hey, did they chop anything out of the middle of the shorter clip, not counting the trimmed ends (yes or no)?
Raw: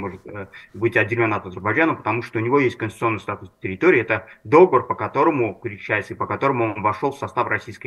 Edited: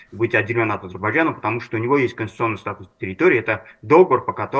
no